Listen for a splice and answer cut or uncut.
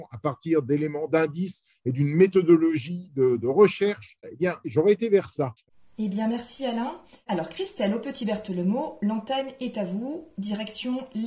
uncut